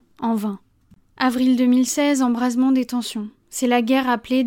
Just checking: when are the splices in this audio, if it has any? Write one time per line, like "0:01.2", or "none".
none